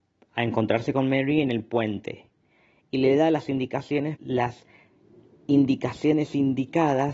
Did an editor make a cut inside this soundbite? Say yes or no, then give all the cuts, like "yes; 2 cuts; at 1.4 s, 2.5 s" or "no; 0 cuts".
yes; 1 cut; at 4.2 s